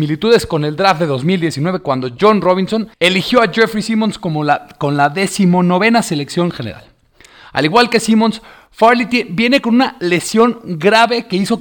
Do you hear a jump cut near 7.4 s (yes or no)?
no